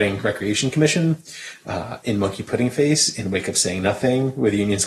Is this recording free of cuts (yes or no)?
yes